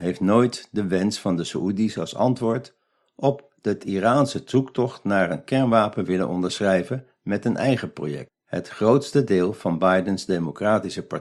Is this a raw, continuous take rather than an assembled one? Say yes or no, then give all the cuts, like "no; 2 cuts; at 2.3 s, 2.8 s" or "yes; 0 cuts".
yes; 0 cuts